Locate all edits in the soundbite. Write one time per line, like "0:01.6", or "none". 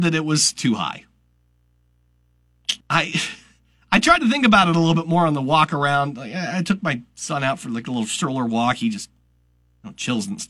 0:02.8